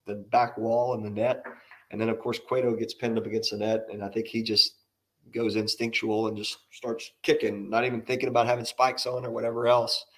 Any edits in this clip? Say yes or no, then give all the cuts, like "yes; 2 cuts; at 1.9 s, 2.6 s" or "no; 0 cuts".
no; 0 cuts